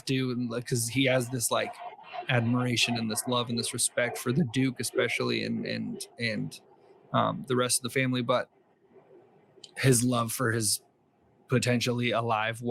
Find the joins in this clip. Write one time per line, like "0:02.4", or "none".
none